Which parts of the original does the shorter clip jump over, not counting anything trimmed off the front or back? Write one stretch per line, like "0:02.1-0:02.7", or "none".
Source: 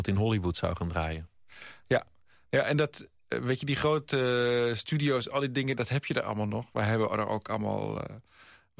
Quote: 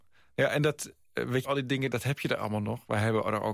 0:03.6-0:05.3

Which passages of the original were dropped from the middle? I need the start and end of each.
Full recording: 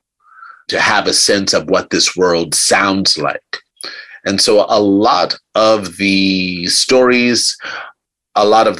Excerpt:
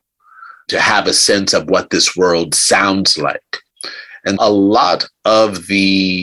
0:04.4-0:04.7

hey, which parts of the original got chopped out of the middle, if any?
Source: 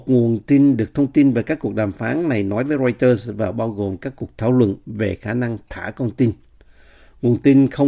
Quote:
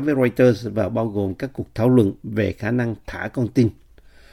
none

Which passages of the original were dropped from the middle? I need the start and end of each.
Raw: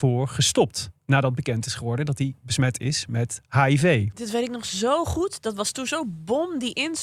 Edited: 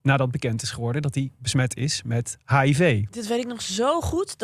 none

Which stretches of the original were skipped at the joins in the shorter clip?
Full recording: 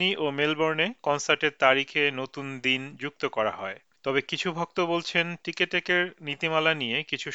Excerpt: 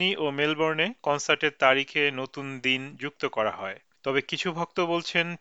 none

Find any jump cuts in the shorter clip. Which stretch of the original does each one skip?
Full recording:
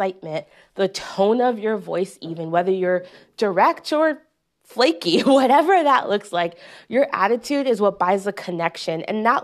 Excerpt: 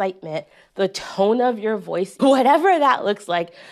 0:02.2-0:05.2

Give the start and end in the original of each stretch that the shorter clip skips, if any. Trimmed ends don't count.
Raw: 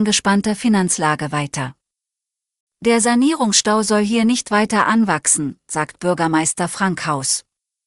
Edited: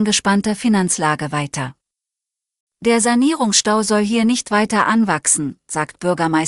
none

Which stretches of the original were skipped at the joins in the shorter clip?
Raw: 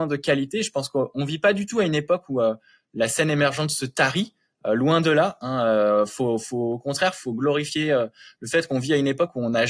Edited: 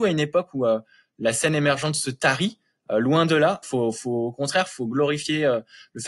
0:05.4-0:06.1

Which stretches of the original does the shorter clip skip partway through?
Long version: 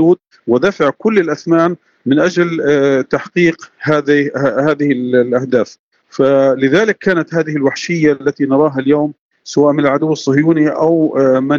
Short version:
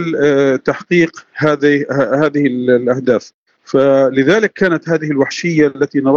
none

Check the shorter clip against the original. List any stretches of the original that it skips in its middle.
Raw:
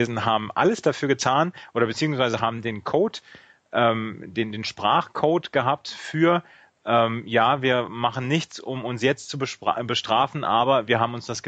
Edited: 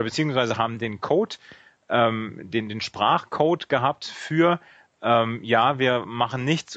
none

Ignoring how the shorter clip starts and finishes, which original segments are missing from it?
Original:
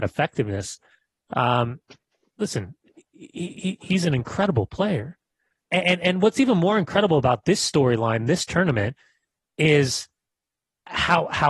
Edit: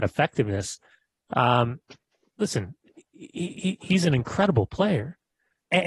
none

